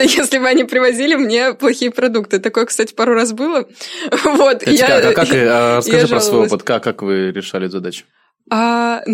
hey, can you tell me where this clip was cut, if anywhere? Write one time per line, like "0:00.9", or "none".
none